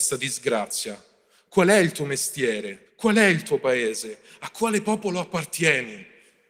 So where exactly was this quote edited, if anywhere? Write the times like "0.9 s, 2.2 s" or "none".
2.9 s